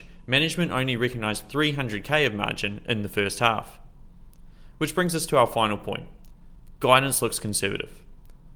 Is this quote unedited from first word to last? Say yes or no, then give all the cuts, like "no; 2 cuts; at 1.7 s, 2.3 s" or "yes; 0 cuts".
yes; 0 cuts